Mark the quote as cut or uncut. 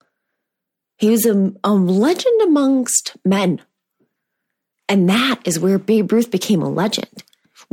cut